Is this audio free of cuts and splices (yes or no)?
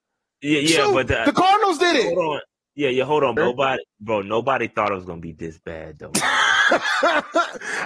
no